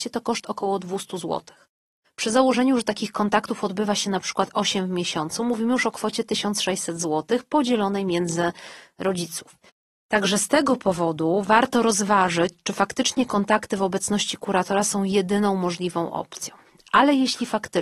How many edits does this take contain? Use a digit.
0